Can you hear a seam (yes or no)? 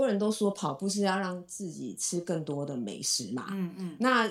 no